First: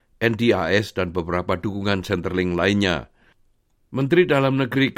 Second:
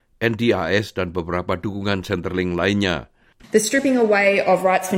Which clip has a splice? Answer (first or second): second